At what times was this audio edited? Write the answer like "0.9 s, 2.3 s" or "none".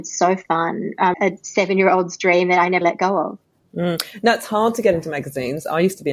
1.1 s, 2.8 s